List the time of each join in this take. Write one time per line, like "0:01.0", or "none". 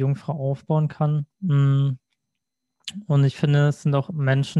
0:01.3